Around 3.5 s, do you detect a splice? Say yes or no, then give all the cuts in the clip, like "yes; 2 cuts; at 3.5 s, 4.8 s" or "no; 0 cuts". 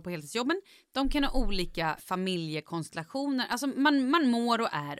no; 1 cut; at 2.0 s